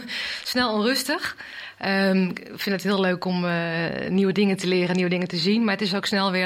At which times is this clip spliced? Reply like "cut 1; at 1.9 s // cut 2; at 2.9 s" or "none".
none